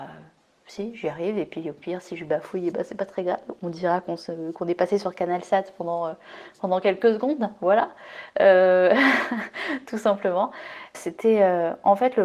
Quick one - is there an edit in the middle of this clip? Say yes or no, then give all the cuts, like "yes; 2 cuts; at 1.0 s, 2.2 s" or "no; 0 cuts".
yes; 1 cut; at 10.9 s